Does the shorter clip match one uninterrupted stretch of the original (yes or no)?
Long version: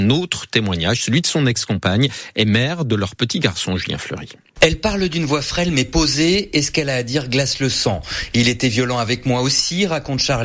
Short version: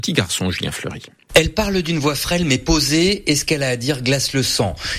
yes